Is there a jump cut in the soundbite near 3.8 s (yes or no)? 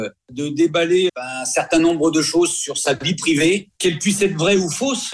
no